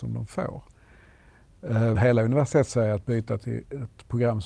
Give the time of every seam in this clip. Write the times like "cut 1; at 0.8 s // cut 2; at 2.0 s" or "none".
cut 1; at 2.0 s